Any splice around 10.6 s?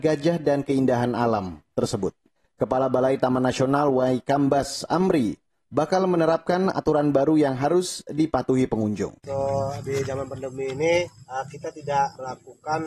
no; 2 cuts; at 2.4 s, 9.2 s

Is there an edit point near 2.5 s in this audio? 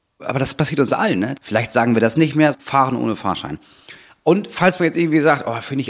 yes; 2 cuts; at 1.4 s, 2.5 s

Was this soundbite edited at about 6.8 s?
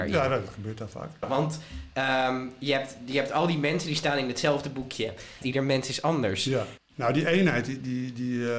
yes; 3 cuts; at 1.2 s, 5.4 s, 6.8 s

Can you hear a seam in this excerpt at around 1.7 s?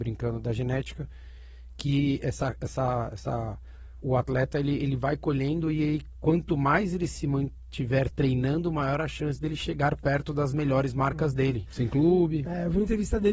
no; 2 cuts; at 4.0 s, 11.7 s

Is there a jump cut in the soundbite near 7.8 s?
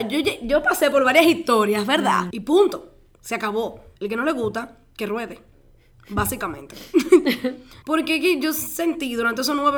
yes; 3 cuts; at 2.3 s, 4.0 s, 7.8 s

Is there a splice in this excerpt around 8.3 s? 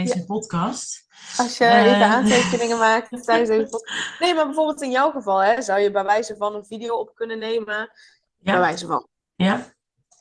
yes; 1 cut; at 8.3 s

